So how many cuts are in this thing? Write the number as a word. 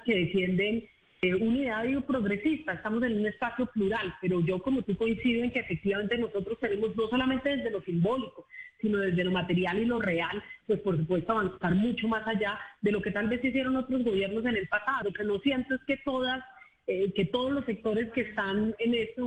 one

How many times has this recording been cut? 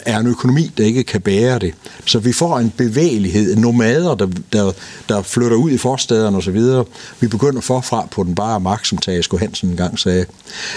one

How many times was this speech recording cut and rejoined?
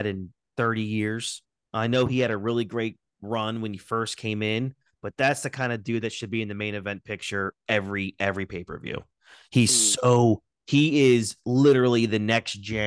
zero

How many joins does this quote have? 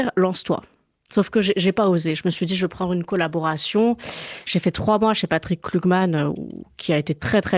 zero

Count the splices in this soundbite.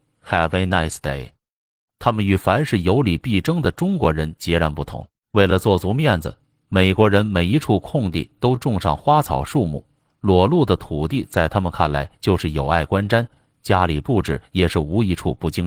one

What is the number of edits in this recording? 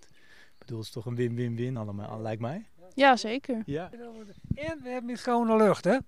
zero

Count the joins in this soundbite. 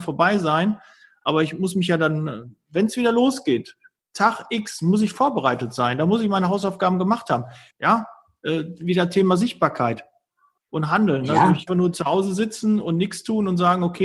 three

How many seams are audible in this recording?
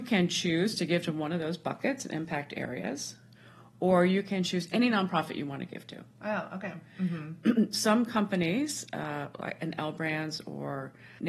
zero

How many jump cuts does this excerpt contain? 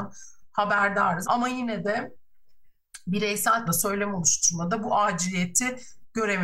two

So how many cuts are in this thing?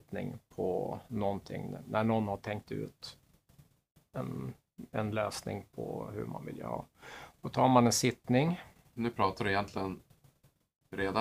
zero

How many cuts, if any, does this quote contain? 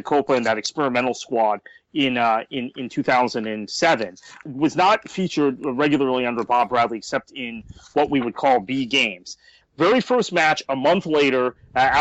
two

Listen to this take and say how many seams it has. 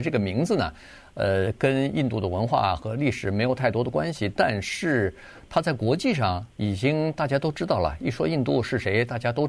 zero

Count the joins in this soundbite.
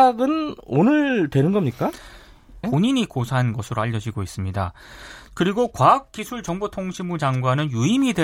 one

